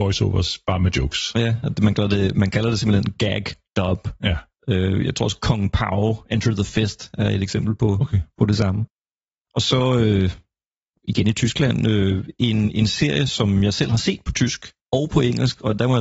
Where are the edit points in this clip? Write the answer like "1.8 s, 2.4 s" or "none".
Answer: none